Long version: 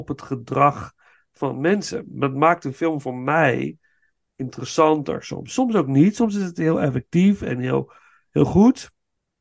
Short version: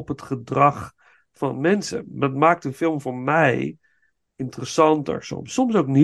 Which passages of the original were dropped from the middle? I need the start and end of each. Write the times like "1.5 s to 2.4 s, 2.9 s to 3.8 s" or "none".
none